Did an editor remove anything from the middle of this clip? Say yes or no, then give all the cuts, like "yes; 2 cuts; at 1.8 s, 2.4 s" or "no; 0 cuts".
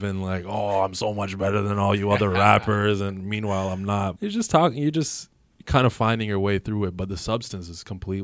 yes; 1 cut; at 4.2 s